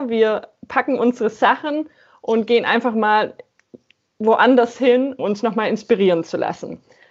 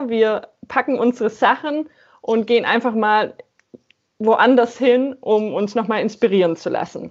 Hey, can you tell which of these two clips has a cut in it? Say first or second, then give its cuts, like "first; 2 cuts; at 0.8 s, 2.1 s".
first; 1 cut; at 5.2 s